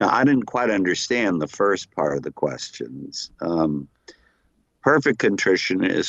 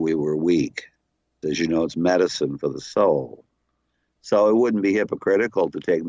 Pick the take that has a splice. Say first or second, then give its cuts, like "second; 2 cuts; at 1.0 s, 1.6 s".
second; 1 cut; at 1.4 s